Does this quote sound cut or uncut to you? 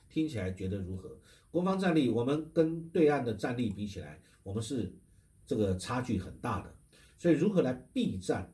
uncut